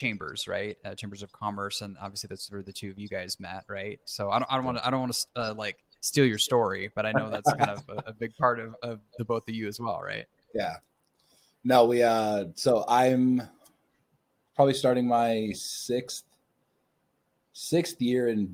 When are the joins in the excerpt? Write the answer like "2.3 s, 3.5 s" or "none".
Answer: none